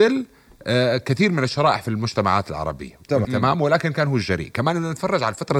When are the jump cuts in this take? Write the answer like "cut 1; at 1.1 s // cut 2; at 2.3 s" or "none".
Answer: cut 1; at 3.2 s

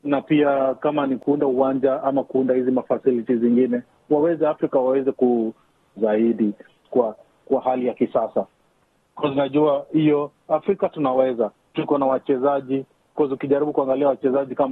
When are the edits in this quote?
cut 1; at 6.0 s

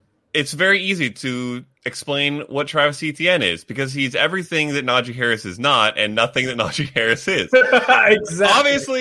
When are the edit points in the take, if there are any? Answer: none

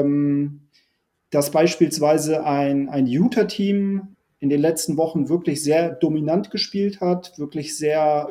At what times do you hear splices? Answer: none

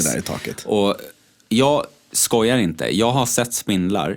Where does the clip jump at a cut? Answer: none

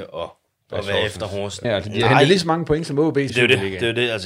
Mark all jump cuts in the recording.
cut 1; at 1.6 s // cut 2; at 3.3 s

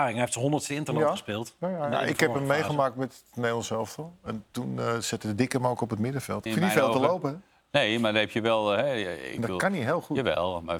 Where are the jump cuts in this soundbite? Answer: cut 1; at 6.5 s

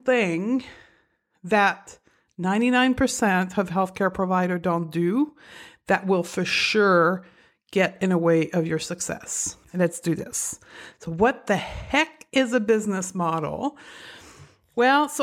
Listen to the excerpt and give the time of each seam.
cut 1; at 9.6 s

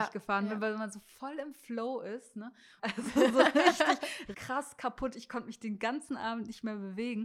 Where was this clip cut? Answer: cut 1; at 2.8 s // cut 2; at 4.3 s

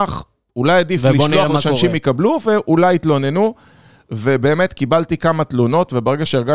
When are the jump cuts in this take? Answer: none

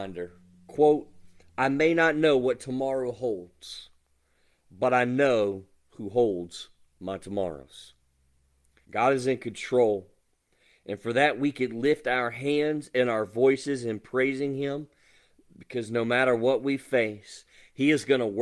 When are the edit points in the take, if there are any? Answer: cut 1; at 8.8 s

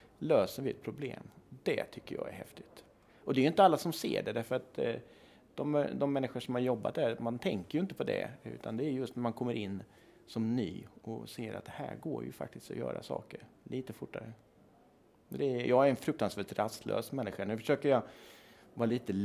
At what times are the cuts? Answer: none

